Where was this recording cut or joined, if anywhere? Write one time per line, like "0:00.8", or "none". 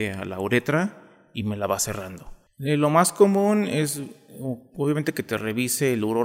0:02.5